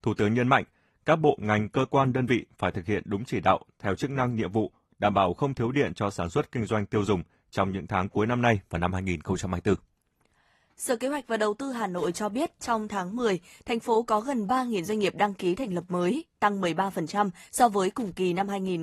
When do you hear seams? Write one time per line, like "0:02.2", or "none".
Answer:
none